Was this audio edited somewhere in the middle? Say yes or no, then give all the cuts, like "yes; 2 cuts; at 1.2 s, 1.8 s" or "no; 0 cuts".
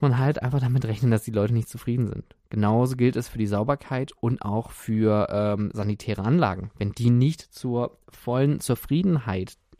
no; 0 cuts